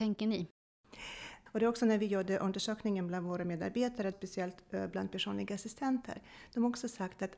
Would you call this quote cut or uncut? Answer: cut